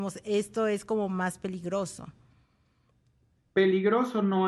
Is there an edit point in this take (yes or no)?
no